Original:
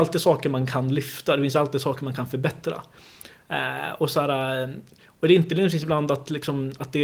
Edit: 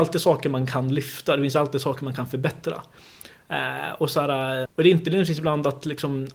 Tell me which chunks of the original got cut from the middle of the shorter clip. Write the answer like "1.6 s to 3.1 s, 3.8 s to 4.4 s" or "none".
4.7 s to 5.1 s